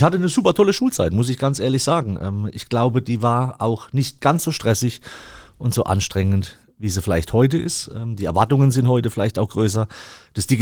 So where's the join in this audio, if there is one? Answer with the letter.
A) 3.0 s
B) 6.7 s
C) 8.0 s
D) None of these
D